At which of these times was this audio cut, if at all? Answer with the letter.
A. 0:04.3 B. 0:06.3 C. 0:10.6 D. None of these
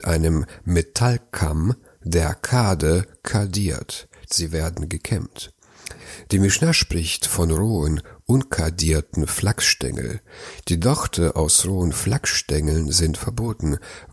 A